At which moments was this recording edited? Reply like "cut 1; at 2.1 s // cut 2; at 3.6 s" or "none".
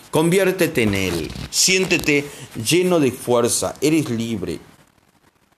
none